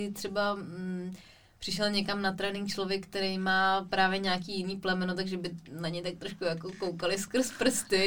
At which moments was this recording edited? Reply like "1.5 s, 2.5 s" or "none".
none